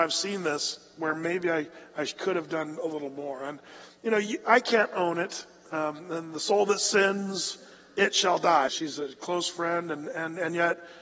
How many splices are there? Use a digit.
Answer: 1